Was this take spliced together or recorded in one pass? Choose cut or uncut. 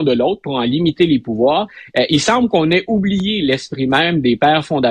uncut